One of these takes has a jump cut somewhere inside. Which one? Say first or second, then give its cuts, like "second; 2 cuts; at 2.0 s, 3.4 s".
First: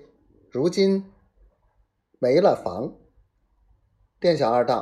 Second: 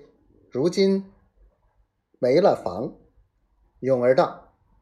second; 1 cut; at 3.6 s